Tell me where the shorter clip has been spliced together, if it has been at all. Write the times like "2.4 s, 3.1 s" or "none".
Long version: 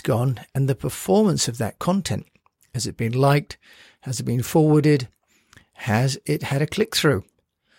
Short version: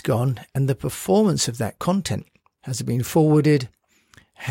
2.6 s